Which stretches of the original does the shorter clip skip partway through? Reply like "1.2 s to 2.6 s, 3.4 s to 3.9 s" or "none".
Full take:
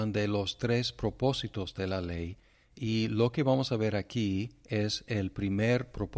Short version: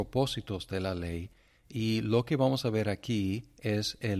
none

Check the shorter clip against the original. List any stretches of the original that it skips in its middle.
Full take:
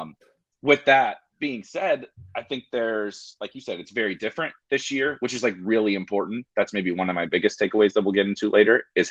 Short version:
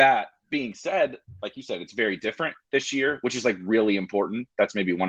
2.3 s to 3.4 s

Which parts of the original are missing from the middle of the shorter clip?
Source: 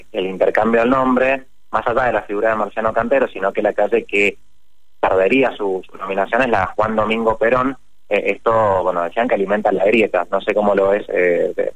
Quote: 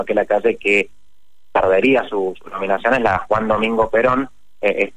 none

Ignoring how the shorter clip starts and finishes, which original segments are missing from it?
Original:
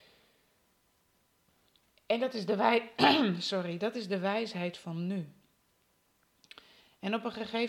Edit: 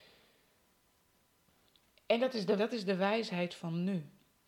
2.6 s to 3.8 s

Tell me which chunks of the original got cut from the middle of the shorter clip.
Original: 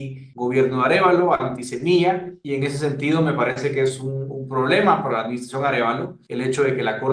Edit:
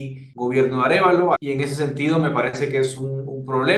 1.4 s to 2.4 s

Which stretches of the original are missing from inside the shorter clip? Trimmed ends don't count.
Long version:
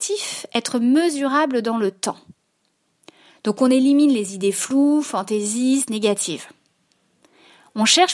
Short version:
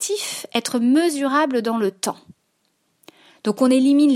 none

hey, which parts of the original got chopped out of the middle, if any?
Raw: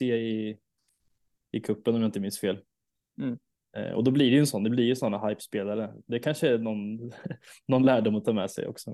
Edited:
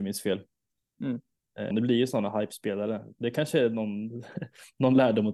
3.9 s to 4.6 s

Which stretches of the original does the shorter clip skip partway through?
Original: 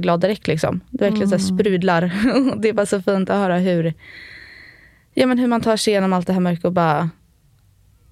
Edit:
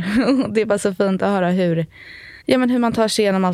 4.5 s to 5.1 s

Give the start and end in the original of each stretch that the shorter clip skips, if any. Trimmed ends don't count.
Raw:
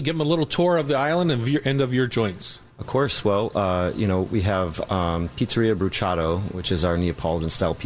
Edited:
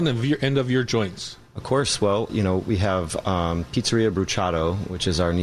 3.5 s to 3.9 s

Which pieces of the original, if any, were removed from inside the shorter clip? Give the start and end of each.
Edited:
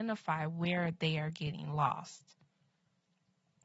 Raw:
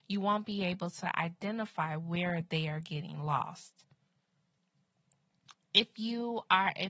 none

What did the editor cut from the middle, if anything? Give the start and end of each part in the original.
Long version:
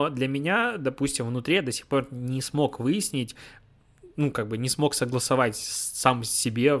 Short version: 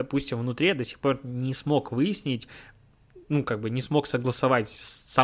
none

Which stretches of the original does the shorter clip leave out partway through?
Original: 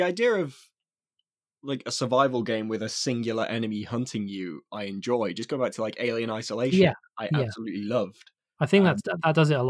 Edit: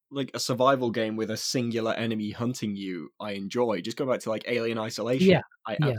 none

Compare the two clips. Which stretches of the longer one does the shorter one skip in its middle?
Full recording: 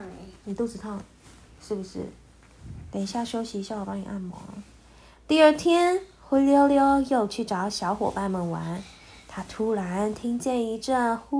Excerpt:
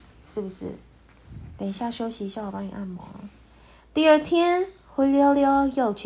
none

